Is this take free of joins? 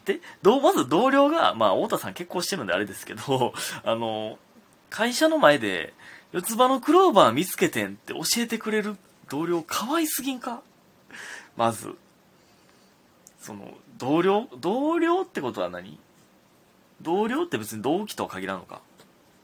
yes; 0 cuts

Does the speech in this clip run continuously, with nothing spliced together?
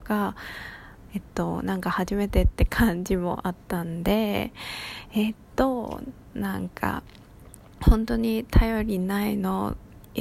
no; 1 cut; at 1.1 s

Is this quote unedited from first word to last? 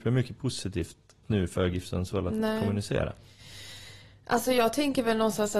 no; 1 cut; at 1.2 s

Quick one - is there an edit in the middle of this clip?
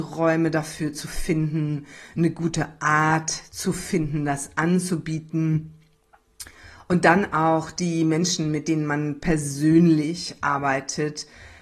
no; 0 cuts

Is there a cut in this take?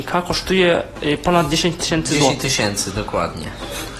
no; 0 cuts

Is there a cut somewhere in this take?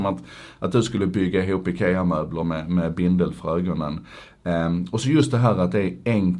no; 0 cuts

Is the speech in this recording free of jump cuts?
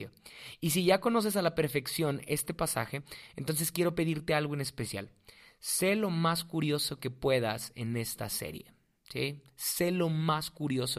yes; 0 cuts

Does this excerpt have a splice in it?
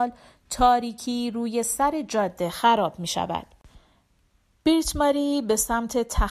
no; 0 cuts

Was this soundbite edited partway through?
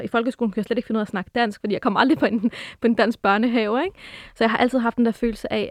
no; 0 cuts

